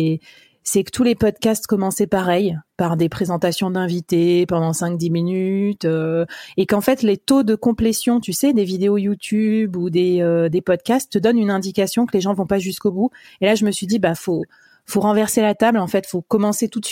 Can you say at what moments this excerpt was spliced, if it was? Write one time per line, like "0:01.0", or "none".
none